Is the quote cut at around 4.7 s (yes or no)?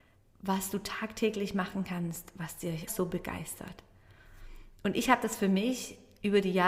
no